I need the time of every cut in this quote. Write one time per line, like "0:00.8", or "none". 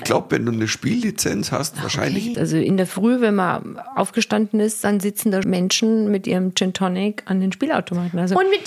0:02.3
0:05.4